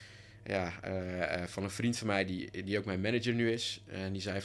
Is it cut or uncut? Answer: uncut